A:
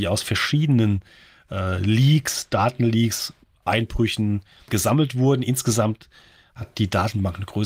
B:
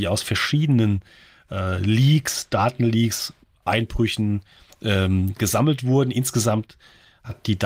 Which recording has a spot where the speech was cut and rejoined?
A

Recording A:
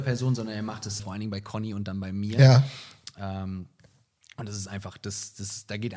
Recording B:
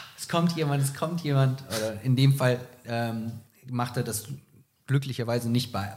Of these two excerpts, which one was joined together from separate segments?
A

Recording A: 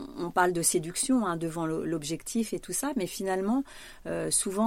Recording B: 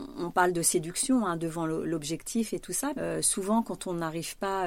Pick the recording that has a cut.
B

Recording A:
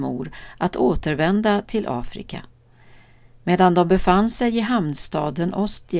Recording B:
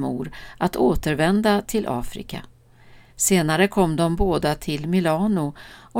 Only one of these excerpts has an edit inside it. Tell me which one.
B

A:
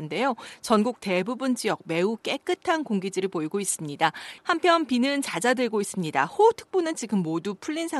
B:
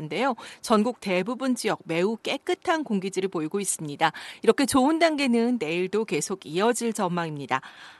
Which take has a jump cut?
A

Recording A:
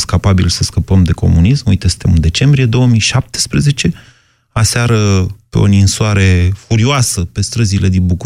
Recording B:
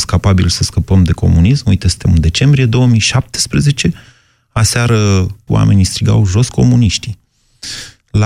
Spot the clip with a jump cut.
B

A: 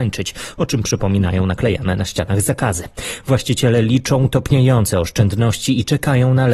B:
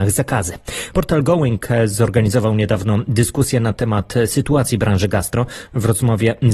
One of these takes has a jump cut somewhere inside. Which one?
B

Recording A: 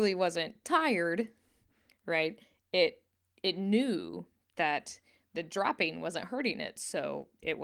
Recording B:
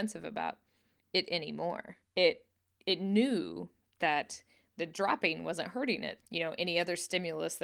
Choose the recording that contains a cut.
B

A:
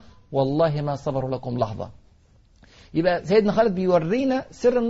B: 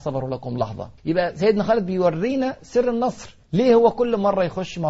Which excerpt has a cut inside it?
B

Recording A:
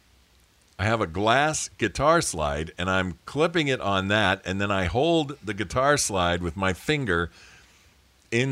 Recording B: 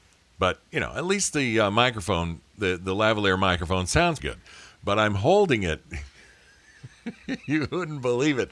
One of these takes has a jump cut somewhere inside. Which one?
B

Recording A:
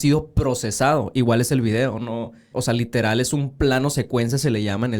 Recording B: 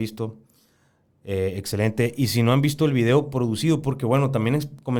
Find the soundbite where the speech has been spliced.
A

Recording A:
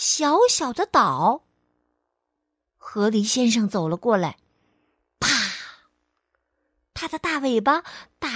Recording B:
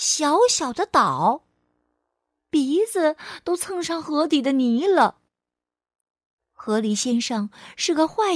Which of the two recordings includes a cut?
B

